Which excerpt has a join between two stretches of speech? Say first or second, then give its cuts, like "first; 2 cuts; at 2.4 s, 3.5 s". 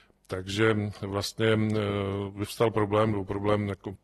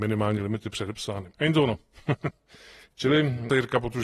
second; 1 cut; at 1.3 s